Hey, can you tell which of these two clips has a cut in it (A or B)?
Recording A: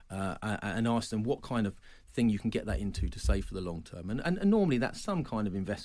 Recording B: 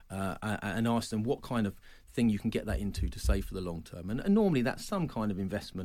B